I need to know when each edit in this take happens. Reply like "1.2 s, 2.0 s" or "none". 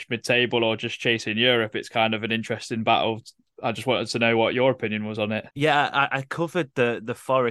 5.5 s